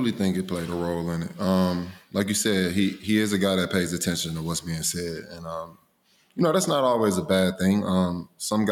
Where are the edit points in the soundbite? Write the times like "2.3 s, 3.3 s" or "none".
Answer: none